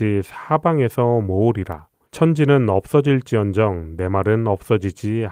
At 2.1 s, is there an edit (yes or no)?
yes